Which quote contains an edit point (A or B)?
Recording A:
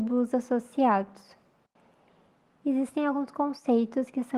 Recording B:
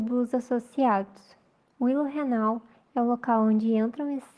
B